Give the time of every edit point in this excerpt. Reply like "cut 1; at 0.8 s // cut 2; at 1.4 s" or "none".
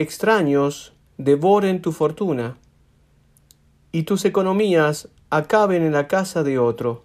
none